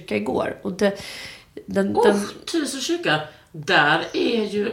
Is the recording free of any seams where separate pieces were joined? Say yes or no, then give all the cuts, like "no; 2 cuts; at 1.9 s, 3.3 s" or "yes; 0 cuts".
yes; 0 cuts